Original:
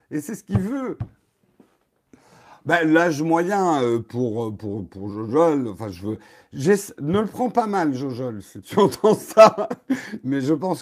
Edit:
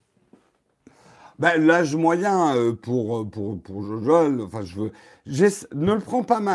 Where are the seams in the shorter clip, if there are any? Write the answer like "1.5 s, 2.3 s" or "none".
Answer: none